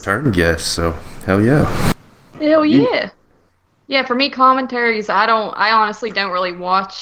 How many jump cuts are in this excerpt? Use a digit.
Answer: 0